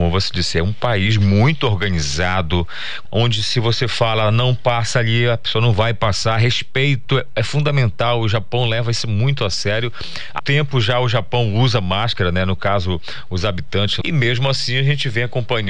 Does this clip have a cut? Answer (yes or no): yes